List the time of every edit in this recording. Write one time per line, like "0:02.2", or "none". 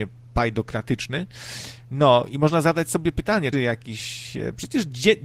0:03.5